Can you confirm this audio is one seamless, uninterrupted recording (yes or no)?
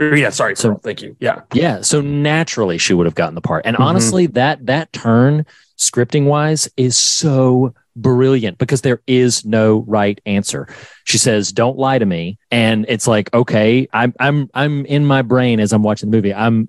no